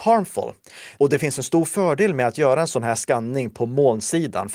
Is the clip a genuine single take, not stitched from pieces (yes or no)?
no